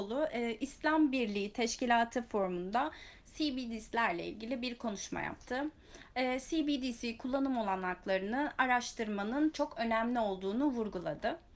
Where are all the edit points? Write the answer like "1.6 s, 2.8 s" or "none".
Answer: 9.5 s

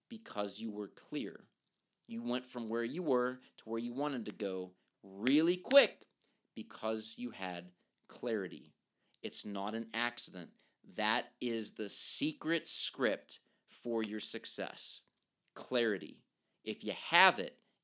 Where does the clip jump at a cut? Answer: none

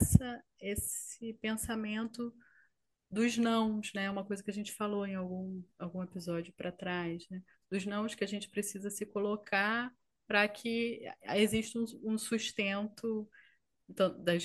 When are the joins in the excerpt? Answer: none

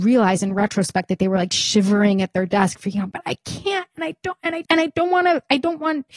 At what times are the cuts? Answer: 3.1 s, 4.7 s

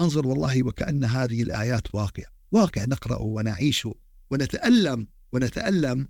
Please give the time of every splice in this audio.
none

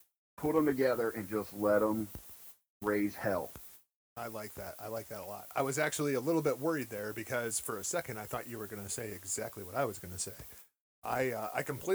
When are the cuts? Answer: none

